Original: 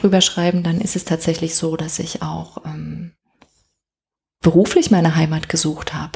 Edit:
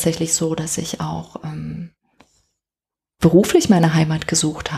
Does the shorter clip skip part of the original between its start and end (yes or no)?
no